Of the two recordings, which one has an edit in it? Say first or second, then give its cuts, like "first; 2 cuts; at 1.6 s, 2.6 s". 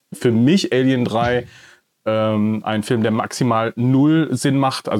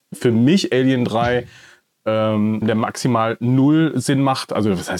second; 1 cut; at 2.6 s